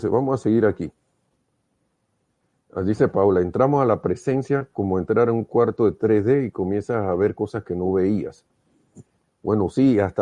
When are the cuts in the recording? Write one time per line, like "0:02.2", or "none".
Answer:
none